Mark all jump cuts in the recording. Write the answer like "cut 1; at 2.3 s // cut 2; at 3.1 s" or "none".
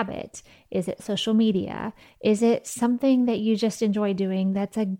none